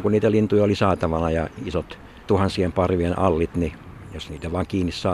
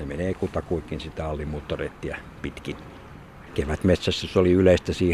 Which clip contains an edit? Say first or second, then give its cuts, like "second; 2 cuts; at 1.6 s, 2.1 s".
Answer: second; 1 cut; at 3.5 s